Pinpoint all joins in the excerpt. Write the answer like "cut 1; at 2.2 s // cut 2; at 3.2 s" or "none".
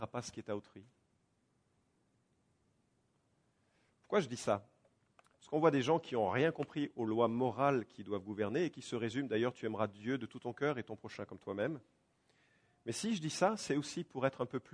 none